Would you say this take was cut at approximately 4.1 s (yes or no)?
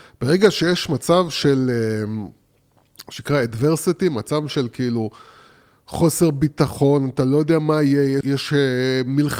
no